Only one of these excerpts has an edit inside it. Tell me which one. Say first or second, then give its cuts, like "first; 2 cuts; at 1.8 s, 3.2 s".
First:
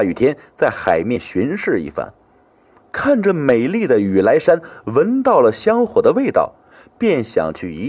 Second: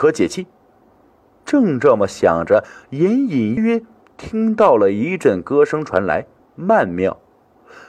second; 2 cuts; at 3.6 s, 6.4 s